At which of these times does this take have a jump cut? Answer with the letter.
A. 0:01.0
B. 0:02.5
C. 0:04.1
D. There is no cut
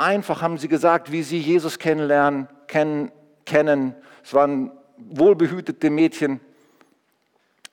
D